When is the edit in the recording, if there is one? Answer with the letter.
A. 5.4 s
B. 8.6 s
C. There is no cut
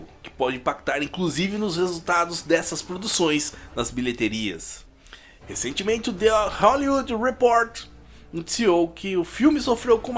A